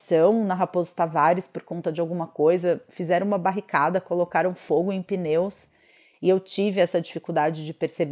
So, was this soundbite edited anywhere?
yes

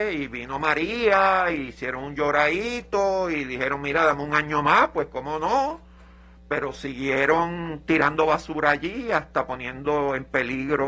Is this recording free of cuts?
yes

